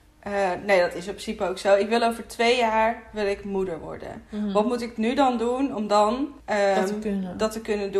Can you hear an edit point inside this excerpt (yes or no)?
yes